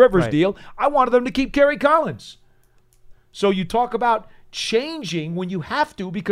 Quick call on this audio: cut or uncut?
cut